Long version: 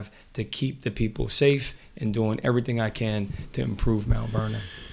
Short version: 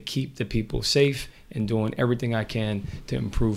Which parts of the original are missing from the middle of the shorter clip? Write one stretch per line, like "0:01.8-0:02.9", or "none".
none